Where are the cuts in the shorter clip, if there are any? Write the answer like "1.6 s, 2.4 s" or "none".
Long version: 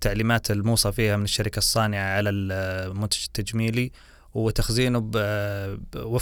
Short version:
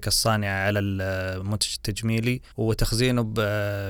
2.5 s